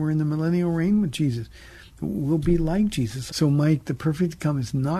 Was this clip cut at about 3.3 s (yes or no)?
yes